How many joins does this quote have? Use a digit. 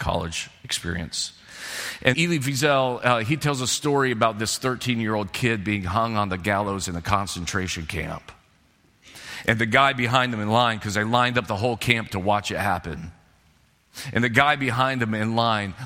1